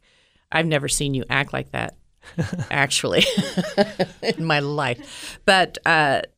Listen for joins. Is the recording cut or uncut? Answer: uncut